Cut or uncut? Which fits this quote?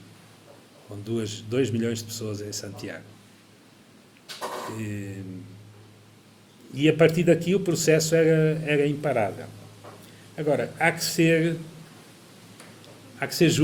uncut